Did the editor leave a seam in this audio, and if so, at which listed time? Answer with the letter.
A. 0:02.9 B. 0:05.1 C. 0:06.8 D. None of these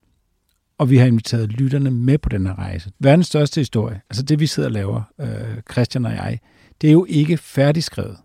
A